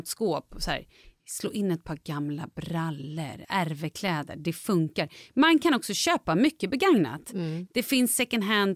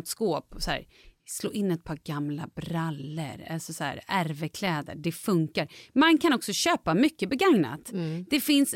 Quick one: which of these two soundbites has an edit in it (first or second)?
first